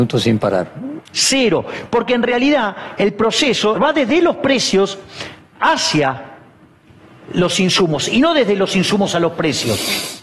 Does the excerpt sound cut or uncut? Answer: cut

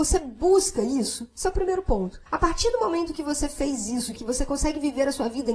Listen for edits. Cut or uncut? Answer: cut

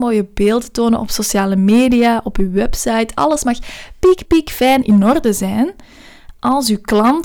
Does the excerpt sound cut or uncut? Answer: cut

